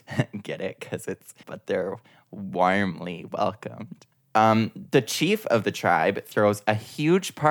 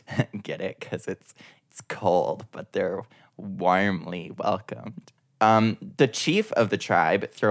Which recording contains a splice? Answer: first; 1 cut; at 1.4 s

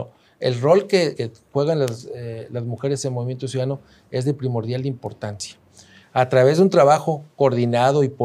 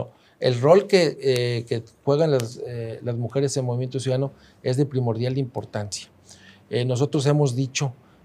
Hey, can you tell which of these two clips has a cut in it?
first; 2 cuts; at 1.2 s, 6.0 s

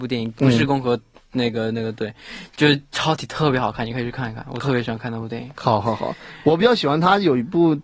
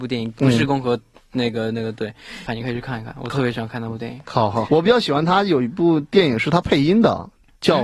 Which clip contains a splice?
second; 2 cuts; at 2.5 s, 4.7 s

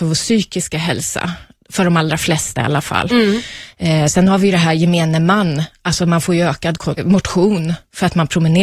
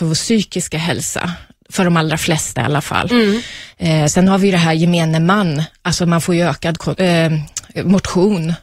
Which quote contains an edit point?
first; 1 cut; at 7.0 s

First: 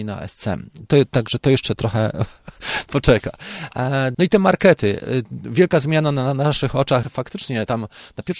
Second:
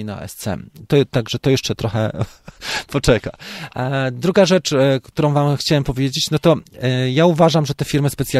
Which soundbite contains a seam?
first; 2 cuts; at 4.1 s, 7.0 s

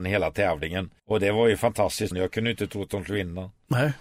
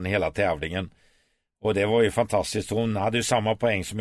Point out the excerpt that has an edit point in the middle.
first; 2 cuts; at 1.0 s, 2.1 s

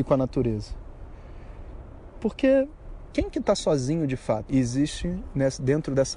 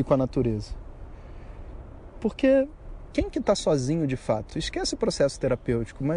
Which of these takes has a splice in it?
first; 1 cut; at 4.5 s

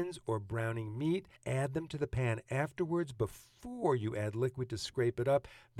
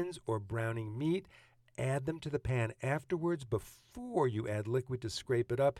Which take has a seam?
first; 1 cut; at 1.4 s

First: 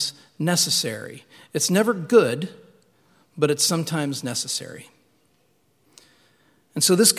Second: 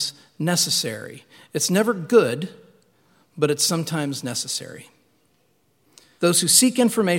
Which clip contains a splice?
second; 1 cut; at 6.2 s

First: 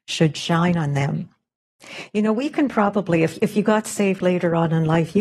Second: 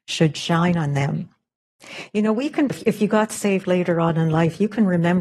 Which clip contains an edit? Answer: second; 1 cut; at 2.7 s

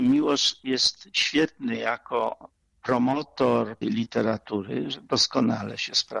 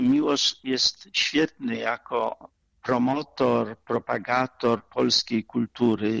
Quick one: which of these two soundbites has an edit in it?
first; 1 cut; at 3.8 s

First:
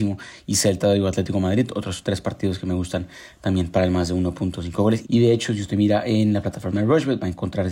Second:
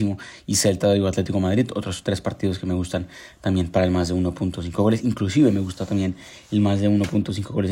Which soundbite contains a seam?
first; 1 cut; at 5.0 s

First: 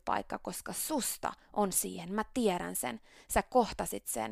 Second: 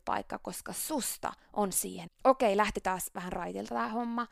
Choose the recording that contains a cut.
second; 1 cut; at 2.1 s

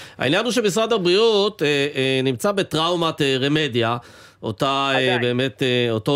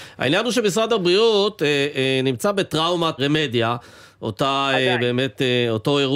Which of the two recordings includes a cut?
second; 1 cut; at 3.2 s

